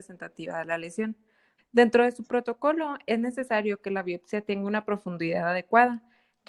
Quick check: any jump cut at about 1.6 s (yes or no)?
yes